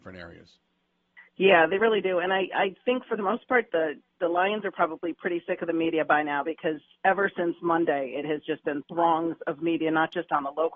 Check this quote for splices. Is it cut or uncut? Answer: uncut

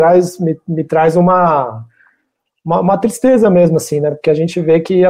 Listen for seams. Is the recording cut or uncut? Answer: uncut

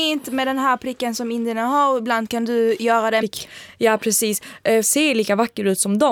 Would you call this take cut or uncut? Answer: cut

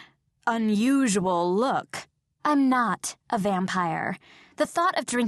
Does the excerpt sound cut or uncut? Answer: cut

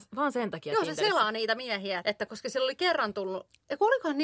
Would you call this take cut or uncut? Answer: cut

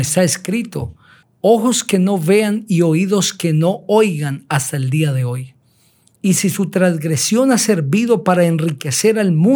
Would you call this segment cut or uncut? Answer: cut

